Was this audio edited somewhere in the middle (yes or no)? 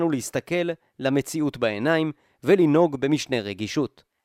no